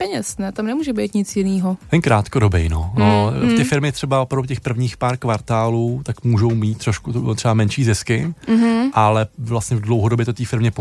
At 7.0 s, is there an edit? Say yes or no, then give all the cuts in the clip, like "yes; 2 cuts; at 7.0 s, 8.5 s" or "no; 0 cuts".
no; 0 cuts